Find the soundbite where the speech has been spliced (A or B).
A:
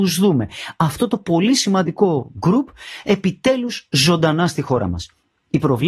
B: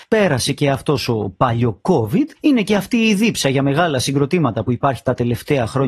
B